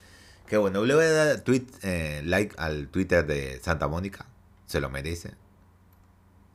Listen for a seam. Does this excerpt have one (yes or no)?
no